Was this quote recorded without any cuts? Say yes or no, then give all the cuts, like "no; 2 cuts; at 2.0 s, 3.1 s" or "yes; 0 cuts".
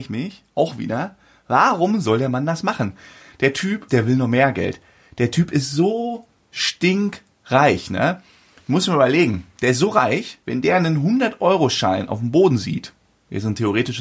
no; 2 cuts; at 3.9 s, 10.4 s